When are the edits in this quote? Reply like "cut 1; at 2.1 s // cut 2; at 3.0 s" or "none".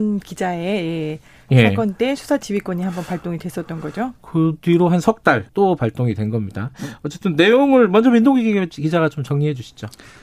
cut 1; at 5.5 s